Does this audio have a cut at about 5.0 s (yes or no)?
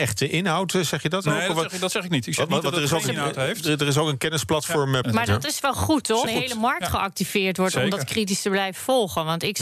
yes